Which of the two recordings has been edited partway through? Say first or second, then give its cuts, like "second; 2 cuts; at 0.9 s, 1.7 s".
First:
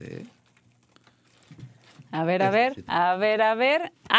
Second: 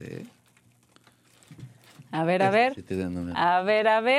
first; 1 cut; at 2.9 s